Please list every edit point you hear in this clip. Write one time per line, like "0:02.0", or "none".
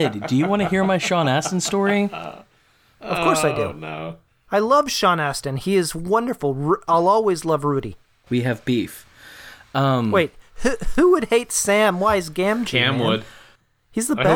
0:08.3